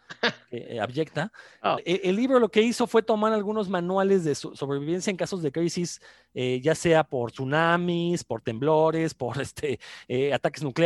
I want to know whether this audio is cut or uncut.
cut